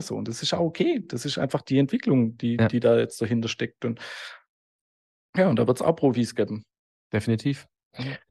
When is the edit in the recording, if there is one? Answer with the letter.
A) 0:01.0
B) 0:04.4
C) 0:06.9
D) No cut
D